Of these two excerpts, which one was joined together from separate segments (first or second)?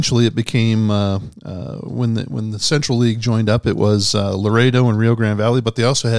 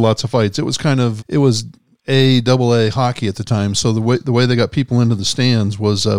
second